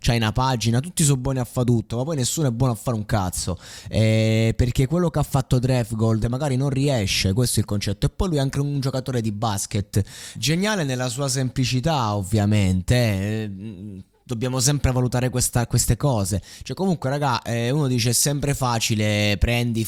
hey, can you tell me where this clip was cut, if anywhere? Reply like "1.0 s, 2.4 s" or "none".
6.2 s, 10.3 s